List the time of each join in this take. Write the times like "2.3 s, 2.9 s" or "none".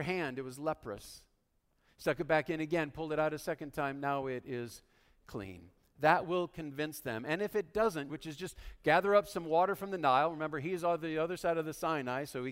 8.1 s